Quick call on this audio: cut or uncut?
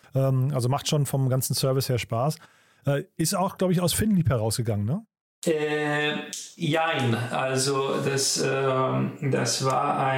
uncut